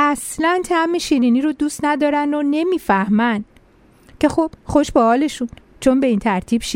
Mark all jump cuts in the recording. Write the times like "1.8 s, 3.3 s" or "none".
none